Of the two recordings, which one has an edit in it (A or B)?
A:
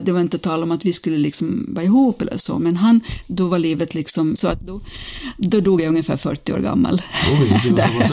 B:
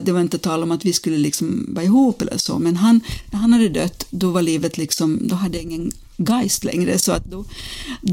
A